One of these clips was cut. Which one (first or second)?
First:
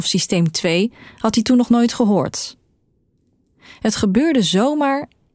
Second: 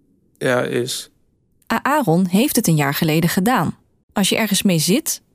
second